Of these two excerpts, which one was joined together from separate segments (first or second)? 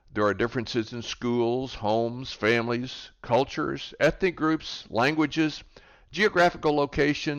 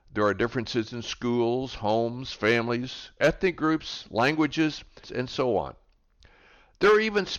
second